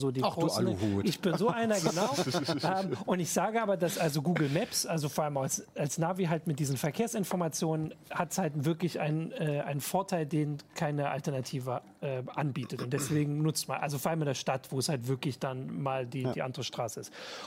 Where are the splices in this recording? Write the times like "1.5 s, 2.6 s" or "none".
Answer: none